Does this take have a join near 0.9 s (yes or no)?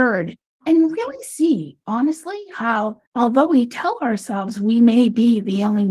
no